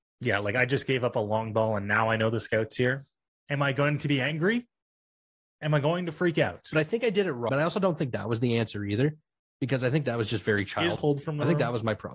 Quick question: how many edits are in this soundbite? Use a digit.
2